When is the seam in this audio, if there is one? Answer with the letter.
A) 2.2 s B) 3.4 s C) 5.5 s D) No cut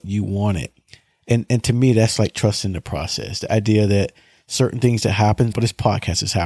C